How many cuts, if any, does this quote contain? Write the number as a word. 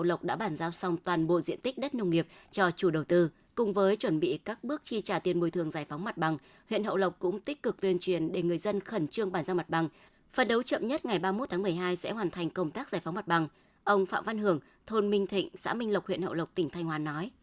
one